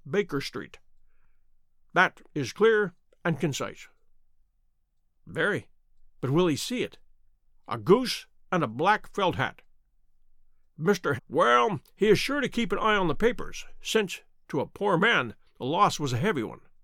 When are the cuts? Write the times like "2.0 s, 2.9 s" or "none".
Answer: 7.5 s, 11.2 s